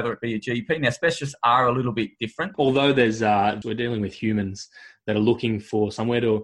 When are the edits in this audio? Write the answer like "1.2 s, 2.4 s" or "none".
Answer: 2.5 s, 3.6 s